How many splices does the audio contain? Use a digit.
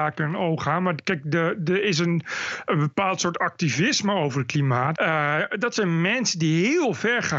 1